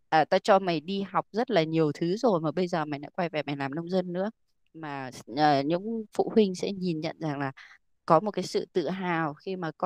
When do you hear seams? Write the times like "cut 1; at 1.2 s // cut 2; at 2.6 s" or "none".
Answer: none